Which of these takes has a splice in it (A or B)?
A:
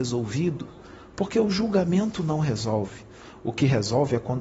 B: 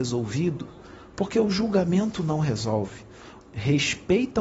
B